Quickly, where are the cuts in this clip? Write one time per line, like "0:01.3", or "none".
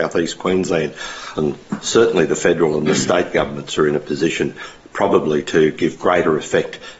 0:01.4

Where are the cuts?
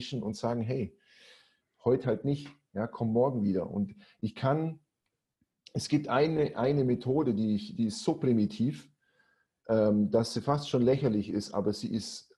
none

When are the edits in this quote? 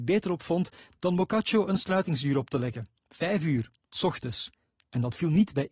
none

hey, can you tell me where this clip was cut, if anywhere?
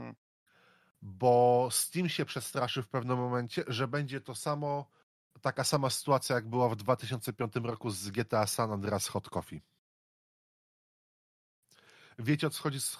none

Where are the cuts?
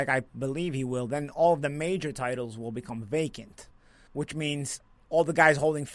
0:04.1

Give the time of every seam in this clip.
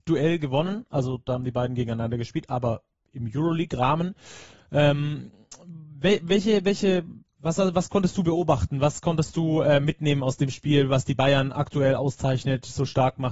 none

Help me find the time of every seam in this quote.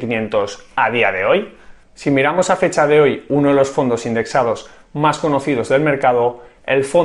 0:01.8

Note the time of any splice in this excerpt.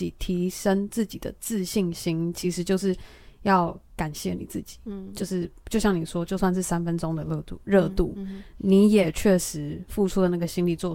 none

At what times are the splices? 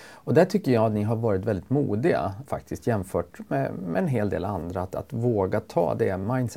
0:02.5

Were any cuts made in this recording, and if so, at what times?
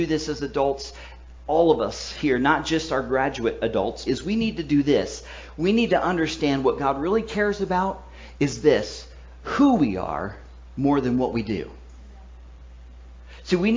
0:04.1

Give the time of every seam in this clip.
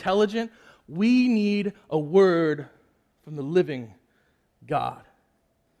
none

